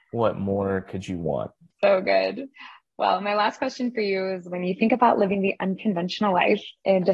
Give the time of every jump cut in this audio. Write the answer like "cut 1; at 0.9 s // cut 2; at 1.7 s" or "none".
cut 1; at 1.7 s